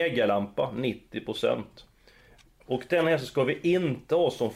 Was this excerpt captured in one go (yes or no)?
yes